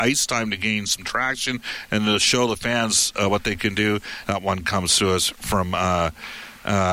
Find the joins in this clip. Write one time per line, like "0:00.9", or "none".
0:04.2